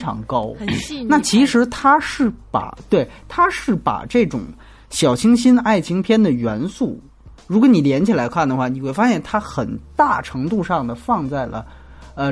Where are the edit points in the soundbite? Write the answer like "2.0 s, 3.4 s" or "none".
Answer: none